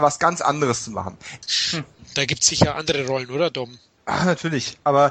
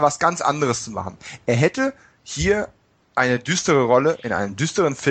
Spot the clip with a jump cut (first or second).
first